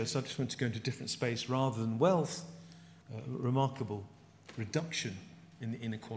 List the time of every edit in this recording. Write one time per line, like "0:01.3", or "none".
0:03.0